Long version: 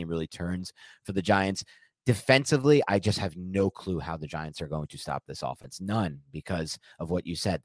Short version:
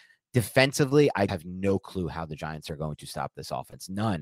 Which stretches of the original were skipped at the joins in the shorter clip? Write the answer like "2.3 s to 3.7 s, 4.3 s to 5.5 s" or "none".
3.0 s to 3.2 s